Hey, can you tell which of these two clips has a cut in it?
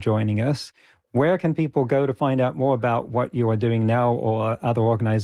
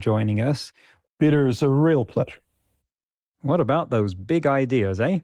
second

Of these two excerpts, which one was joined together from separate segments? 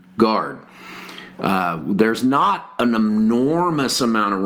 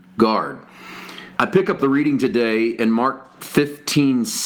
second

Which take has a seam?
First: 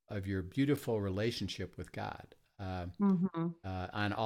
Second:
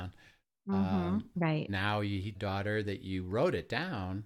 second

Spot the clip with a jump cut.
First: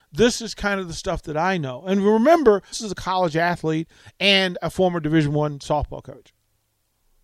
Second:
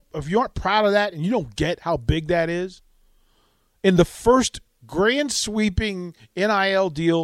first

